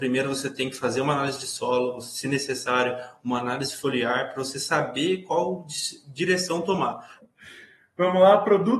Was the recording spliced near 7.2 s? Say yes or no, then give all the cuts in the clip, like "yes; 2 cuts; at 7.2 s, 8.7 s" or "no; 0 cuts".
yes; 1 cut; at 7.2 s